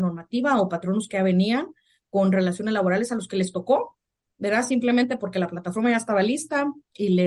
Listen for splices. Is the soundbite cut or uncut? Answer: uncut